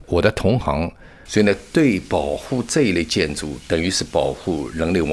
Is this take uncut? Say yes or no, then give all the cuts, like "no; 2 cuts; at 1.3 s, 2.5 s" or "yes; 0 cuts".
no; 1 cut; at 1.3 s